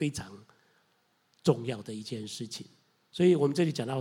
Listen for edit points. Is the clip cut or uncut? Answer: uncut